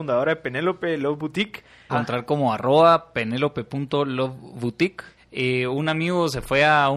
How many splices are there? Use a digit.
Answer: 2